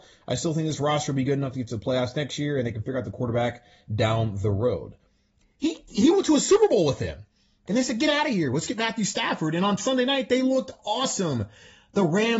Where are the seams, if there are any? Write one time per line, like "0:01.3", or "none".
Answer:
0:05.4
0:07.7